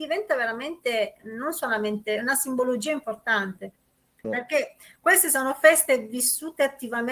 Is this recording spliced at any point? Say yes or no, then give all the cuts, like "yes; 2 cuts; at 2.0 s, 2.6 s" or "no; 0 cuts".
yes; 1 cut; at 4.2 s